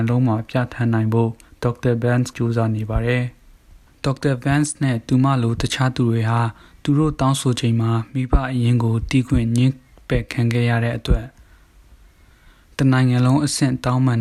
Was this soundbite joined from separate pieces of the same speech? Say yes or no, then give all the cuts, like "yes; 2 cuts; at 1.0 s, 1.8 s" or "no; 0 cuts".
yes; 1 cut; at 2.3 s